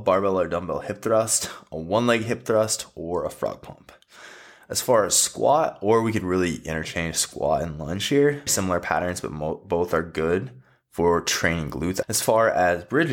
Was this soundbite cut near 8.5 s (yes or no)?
yes